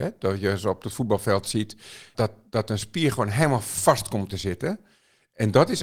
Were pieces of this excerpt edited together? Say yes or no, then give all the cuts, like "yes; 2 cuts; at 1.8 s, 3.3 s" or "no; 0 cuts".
yes; 1 cut; at 2.1 s